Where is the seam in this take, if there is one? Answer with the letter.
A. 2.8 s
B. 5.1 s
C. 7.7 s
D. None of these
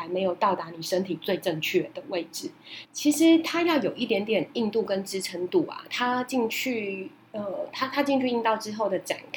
A